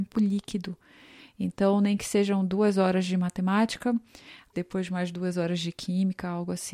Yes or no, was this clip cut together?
yes